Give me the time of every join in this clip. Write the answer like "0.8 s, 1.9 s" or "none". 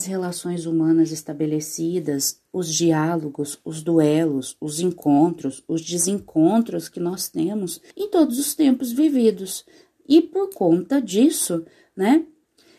7.9 s